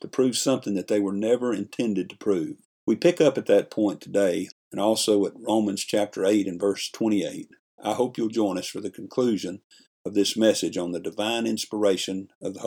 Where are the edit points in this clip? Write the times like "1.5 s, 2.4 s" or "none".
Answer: 4.5 s